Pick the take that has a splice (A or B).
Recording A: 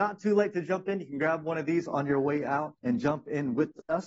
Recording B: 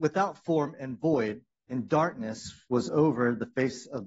A